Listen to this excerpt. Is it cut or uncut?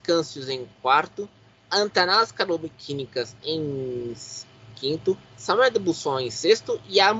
uncut